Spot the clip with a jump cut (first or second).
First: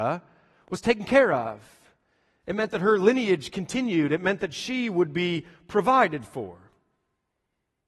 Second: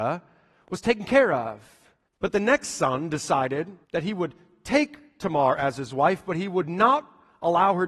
second